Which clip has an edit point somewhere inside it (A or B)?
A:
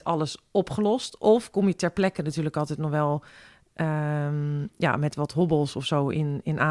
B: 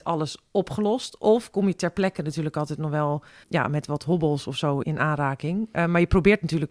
B